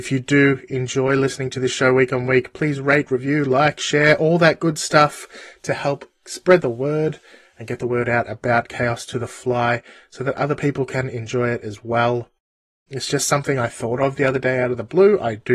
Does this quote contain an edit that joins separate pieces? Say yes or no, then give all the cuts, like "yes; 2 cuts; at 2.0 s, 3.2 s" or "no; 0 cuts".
yes; 1 cut; at 12.9 s